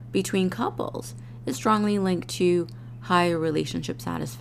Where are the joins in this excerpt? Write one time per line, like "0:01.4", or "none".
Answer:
0:01.5